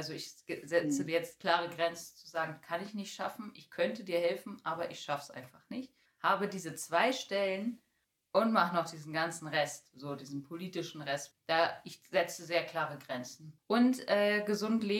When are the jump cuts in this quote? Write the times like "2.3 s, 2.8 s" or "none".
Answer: 6.1 s, 11.3 s, 13.6 s